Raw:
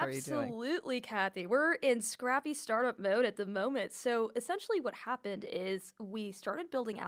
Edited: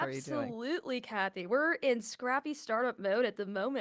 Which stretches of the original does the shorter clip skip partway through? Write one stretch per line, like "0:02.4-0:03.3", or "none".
none